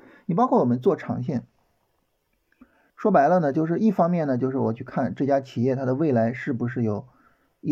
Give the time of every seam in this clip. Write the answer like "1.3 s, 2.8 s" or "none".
2.9 s

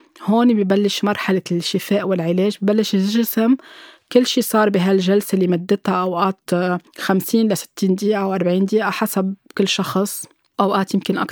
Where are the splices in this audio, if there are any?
6.9 s

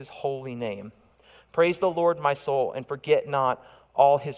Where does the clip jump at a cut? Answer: none

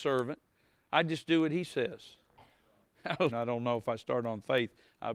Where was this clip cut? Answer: 3.3 s

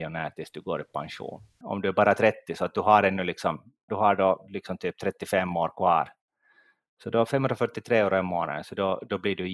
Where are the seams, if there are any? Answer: 1.6 s, 3.9 s

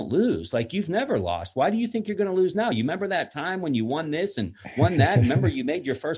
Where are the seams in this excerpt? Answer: none

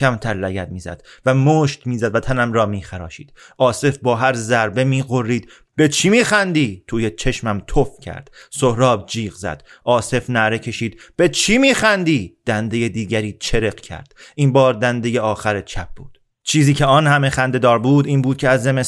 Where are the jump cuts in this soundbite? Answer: none

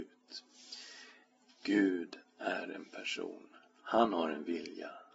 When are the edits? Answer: none

